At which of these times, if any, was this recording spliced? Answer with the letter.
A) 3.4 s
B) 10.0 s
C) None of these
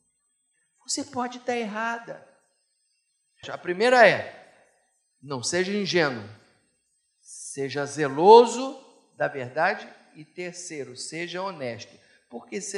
A